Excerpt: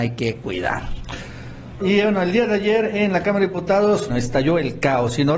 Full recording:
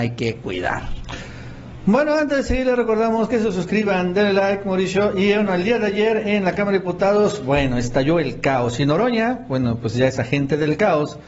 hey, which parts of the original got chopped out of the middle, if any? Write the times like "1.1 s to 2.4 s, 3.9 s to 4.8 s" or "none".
1.8 s to 5.1 s, 7.4 s to 7.7 s

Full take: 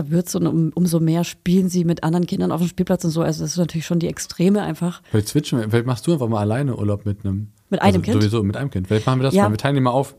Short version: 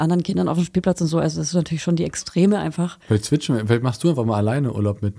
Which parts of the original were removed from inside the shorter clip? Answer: none

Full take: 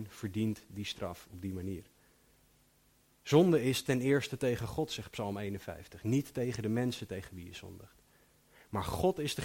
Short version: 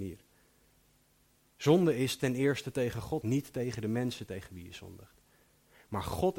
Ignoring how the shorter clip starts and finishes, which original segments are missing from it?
4.9 s to 6.0 s

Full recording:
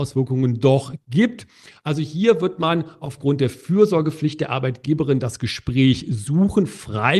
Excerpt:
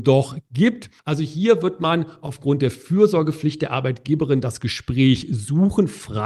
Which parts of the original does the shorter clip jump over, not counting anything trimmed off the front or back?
1.6 s to 1.8 s

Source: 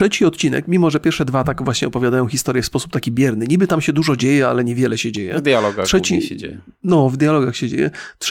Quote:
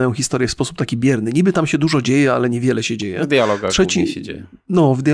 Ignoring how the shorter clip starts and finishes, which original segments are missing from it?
none

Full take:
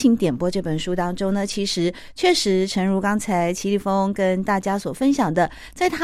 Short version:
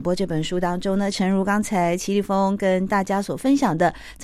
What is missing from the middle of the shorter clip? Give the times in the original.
1.5 s to 2.7 s

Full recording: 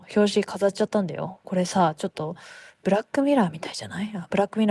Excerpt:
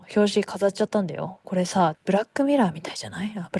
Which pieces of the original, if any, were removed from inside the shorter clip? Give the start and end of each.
1.9 s to 2.7 s

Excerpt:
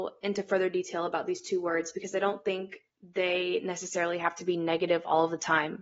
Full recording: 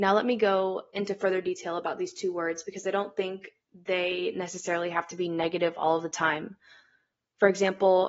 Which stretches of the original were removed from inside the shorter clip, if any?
none

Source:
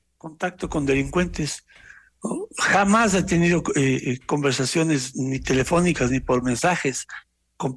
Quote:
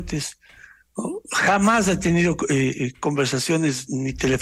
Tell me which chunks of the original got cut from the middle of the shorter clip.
none

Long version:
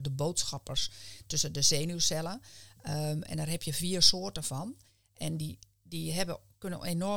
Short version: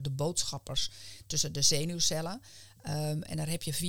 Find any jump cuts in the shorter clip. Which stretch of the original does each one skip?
none

